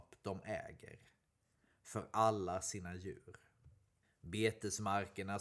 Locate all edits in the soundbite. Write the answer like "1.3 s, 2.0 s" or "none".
none